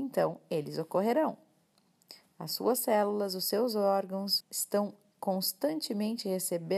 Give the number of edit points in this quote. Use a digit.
1